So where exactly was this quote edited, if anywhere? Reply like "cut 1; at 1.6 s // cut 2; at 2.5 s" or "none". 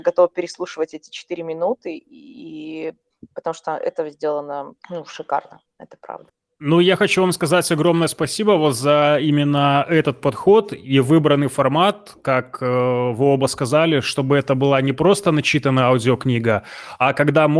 none

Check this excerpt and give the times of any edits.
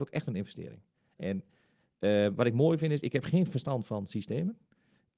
none

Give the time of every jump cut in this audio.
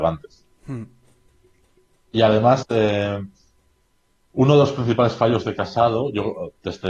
none

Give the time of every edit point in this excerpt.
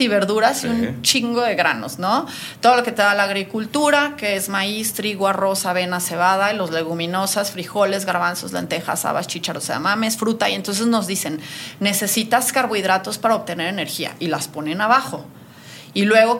none

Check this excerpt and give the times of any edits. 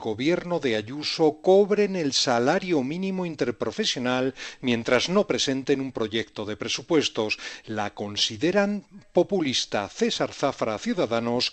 cut 1; at 7.6 s

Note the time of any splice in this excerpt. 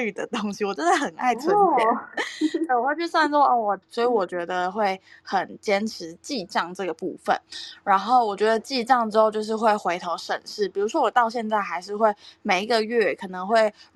cut 1; at 3.8 s

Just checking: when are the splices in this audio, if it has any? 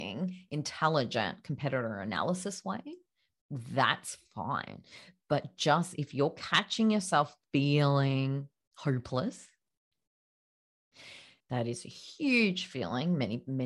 cut 1; at 11.4 s

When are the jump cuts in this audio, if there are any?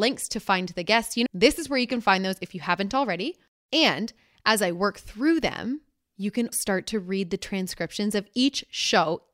cut 1; at 1.3 s // cut 2; at 6.5 s

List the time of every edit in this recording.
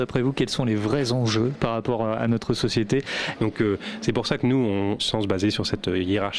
cut 1; at 3.4 s // cut 2; at 5.0 s

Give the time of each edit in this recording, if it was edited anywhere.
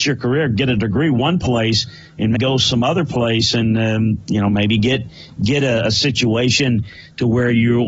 cut 1; at 2.4 s

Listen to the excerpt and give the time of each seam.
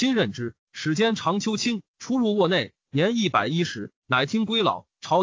cut 1; at 1.9 s

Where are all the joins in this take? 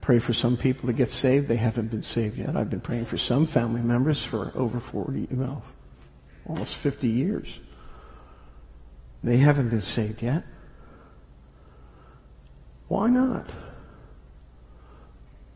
none

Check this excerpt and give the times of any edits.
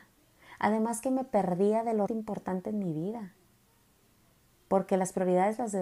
cut 1; at 2.1 s

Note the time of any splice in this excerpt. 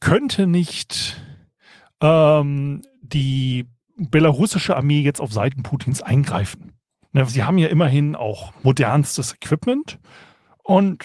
cut 1; at 7.3 s

